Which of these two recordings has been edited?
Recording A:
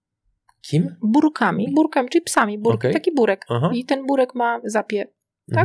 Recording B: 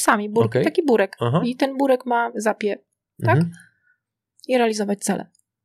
A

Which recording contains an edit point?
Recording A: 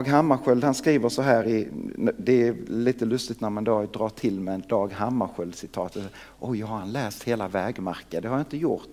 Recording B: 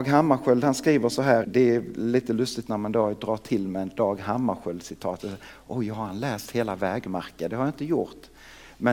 B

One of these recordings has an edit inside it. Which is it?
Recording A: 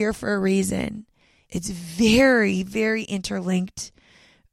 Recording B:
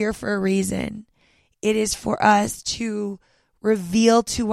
A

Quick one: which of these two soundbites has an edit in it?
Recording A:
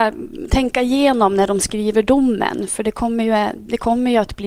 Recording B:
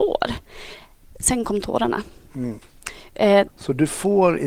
B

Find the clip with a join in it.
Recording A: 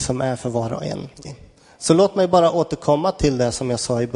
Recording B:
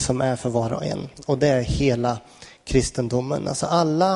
A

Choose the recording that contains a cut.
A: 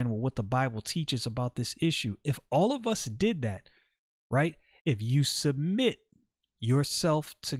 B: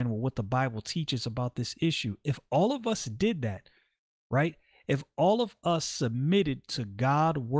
A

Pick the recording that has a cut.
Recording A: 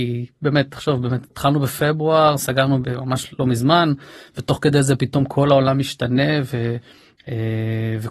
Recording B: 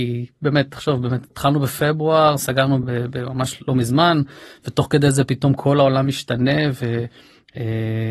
A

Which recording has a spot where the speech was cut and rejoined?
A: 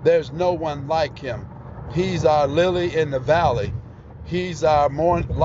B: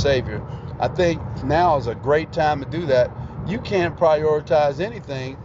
B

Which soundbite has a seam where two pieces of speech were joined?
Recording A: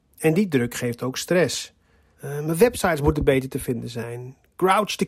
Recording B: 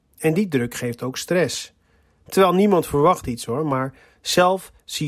A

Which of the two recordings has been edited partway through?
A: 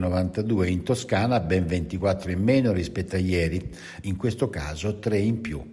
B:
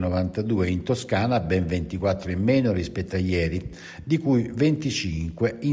A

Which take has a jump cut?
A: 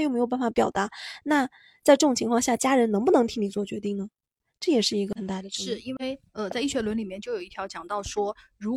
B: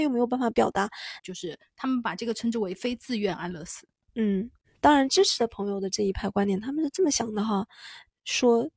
B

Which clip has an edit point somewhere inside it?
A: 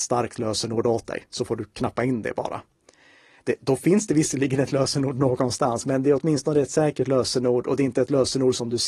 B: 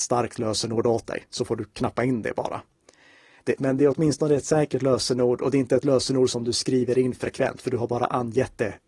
B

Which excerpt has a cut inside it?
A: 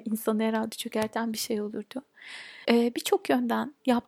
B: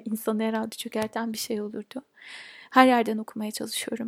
A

